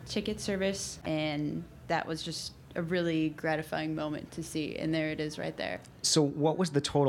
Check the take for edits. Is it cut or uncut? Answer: cut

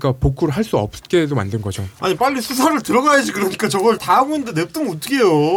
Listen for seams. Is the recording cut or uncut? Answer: cut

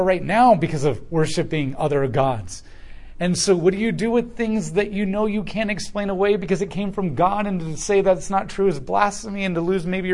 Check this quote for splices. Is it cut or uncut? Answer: uncut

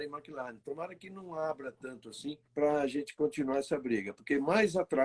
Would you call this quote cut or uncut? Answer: cut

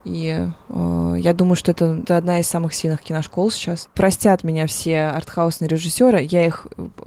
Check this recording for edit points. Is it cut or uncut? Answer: cut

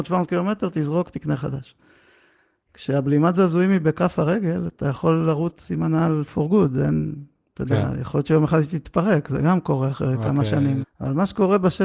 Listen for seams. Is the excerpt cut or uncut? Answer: cut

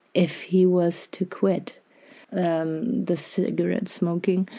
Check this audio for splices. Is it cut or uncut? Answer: cut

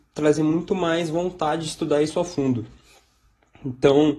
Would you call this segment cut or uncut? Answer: uncut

